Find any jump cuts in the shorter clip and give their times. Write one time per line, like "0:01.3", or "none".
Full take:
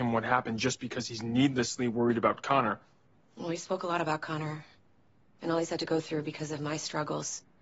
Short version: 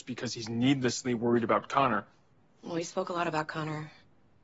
none